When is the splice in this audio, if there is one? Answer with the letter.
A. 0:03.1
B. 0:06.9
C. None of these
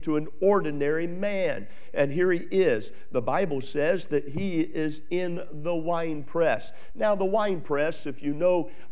C